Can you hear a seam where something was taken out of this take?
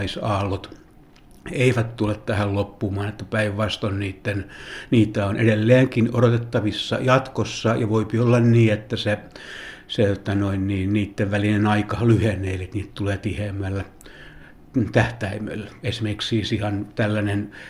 no; 0 cuts

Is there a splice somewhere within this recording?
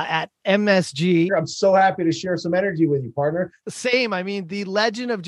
yes; 2 cuts; at 1.3 s, 3.6 s

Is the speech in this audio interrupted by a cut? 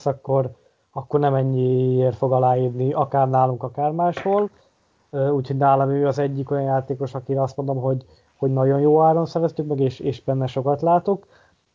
no; 0 cuts

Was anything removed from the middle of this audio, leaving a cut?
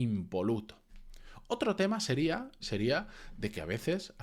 yes; 1 cut; at 2.6 s

